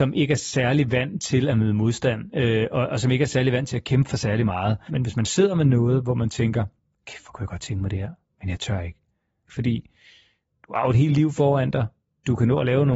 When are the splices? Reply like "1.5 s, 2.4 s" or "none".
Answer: 4.9 s, 9.5 s